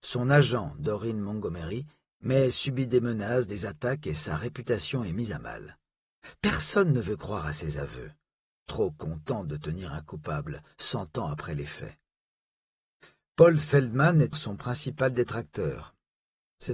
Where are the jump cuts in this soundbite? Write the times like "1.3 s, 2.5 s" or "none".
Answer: 14.3 s